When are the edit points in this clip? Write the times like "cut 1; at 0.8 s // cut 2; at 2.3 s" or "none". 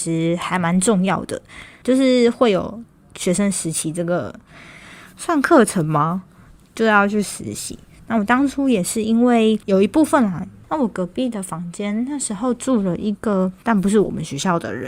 cut 1; at 10.6 s // cut 2; at 13.6 s